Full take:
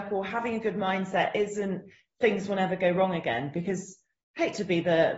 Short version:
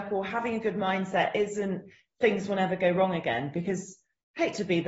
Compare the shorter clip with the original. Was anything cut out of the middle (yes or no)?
no